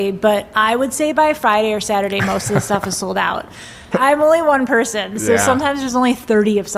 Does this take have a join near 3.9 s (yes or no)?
yes